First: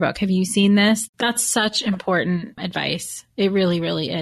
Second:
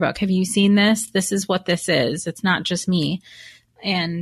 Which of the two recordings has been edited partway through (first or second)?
first